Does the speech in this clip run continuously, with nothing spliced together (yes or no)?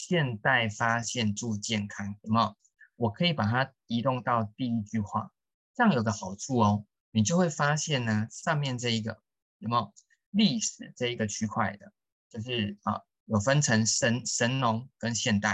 yes